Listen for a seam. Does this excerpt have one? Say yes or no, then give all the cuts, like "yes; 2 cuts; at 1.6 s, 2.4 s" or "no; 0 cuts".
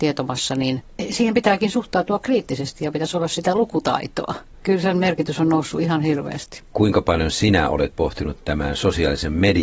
yes; 1 cut; at 6.7 s